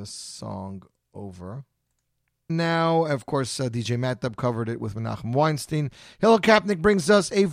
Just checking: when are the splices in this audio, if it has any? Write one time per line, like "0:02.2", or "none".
0:02.5